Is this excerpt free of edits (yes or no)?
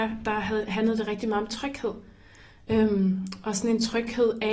yes